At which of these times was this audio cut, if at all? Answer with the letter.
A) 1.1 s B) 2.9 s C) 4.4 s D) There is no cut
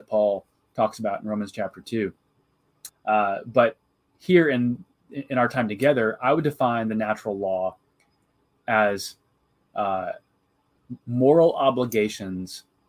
B